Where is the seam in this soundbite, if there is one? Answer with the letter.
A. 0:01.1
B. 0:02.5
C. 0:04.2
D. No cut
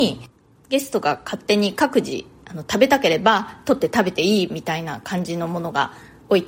D